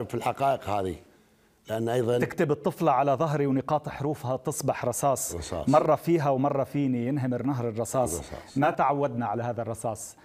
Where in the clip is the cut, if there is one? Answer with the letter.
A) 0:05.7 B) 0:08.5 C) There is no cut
C